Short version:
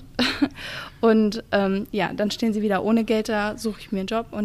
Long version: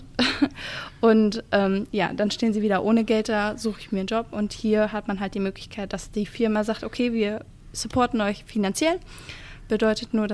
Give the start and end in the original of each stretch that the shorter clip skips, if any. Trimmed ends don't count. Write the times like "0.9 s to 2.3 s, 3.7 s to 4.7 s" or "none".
none